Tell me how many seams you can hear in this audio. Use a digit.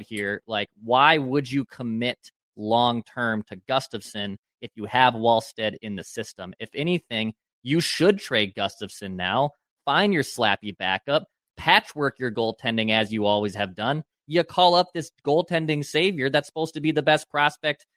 1